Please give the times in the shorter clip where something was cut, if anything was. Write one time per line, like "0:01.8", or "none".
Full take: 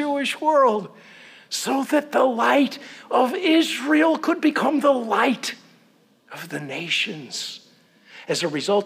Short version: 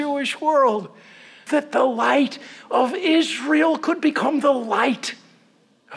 0:01.5

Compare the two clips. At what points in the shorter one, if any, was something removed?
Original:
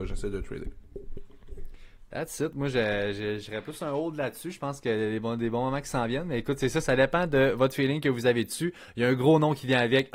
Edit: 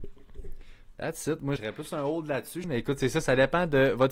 0:01.6
0:02.6

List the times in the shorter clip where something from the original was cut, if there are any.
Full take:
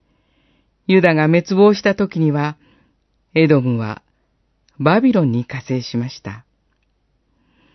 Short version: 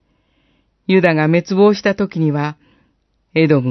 none

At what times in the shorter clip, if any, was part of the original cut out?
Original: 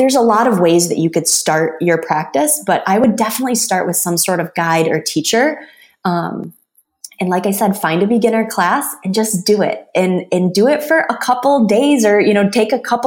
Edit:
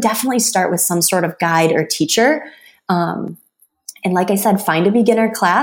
none

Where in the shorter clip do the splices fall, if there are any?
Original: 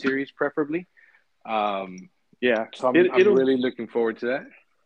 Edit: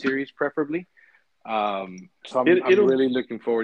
0:02.2

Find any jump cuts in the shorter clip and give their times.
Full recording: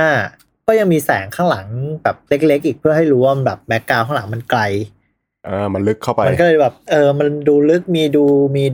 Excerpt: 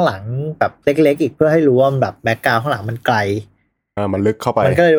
0:04.0

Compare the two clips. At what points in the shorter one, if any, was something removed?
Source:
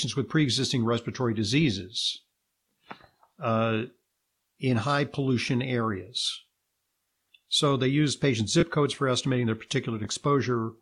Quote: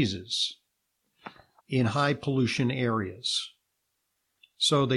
0:01.6

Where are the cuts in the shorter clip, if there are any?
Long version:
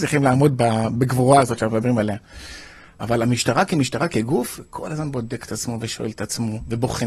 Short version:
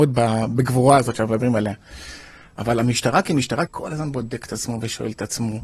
0:03.7

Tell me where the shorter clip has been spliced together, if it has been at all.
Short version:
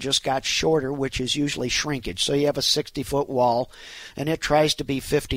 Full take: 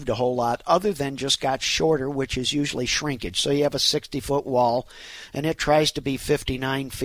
none

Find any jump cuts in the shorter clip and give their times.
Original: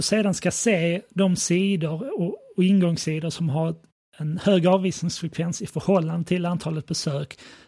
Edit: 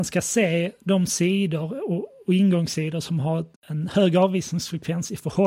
0:03.6

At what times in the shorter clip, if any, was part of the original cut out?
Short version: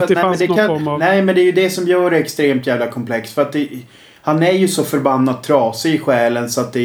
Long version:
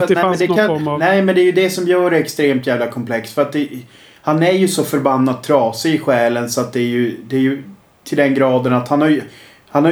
none

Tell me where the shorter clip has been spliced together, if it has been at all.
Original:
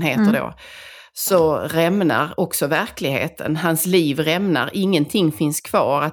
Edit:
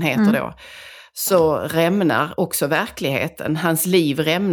none

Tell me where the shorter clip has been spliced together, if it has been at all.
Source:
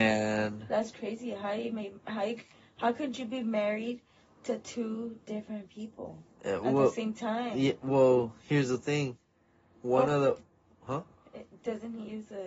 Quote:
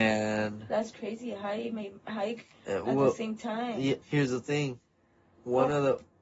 0:02.6
0:04.0

